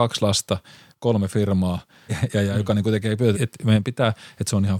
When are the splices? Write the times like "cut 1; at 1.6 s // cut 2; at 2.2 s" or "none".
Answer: cut 1; at 2.1 s // cut 2; at 3.3 s